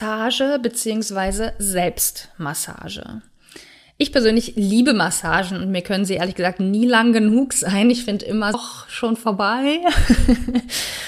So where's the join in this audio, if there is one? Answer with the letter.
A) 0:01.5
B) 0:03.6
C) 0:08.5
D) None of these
C